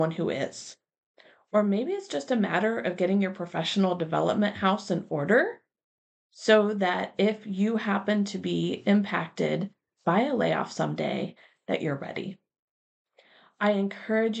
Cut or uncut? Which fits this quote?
uncut